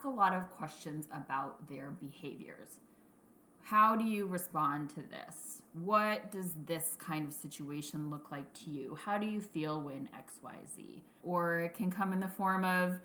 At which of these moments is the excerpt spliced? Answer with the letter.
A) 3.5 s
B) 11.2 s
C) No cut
B